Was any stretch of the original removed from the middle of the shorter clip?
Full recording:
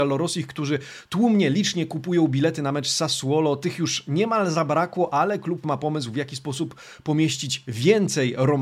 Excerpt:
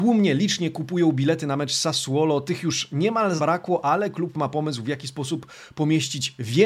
yes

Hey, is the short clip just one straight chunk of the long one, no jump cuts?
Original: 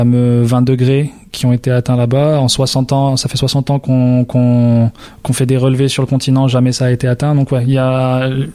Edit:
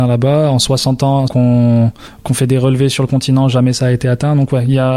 no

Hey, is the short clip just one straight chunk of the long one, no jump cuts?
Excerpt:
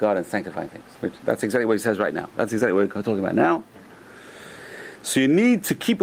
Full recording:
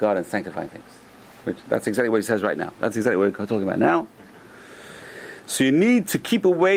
no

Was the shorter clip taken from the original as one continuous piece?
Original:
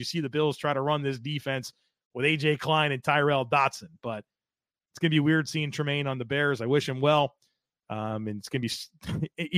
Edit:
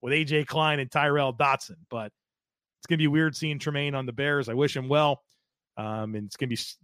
yes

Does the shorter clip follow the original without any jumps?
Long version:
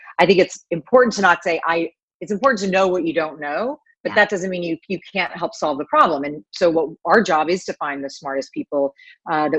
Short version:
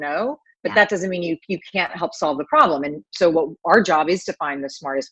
yes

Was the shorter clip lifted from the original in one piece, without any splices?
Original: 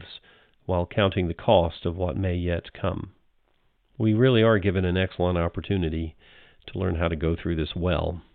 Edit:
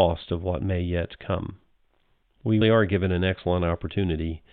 no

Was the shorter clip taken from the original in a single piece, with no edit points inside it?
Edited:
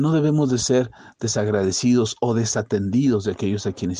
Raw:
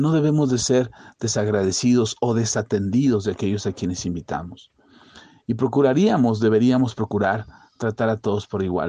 yes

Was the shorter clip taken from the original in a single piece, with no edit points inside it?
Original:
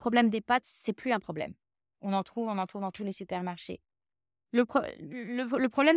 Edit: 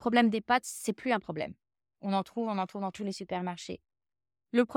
yes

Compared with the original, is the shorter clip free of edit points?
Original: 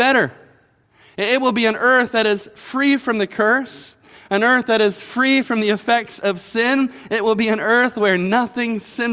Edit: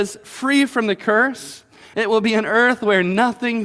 no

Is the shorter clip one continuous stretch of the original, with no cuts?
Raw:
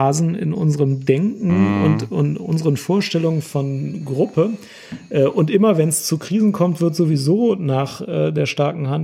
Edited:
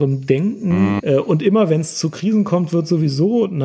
no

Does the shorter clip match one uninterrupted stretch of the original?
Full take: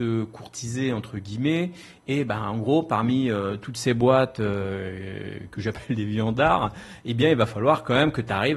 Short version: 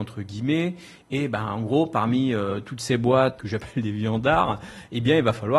no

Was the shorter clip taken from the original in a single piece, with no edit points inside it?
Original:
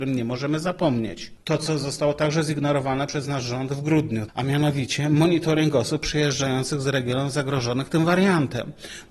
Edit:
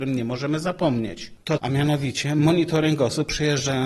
no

